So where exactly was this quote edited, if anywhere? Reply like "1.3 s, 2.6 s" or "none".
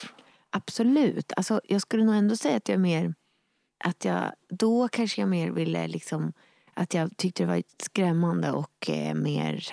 none